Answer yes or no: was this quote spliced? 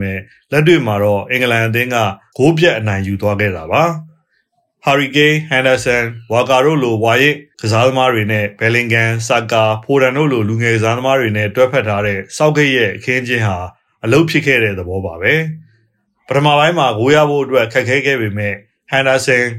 no